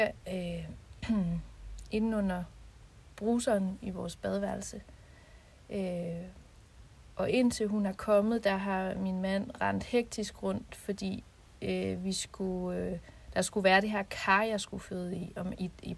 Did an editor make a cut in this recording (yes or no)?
no